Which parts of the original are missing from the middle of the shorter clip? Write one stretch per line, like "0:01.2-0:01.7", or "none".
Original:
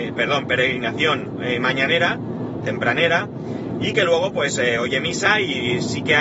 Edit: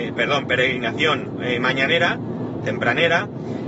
none